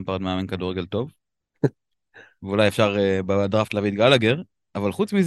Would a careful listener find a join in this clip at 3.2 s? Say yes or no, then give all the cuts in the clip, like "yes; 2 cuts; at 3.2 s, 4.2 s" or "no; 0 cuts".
no; 1 cut; at 1.5 s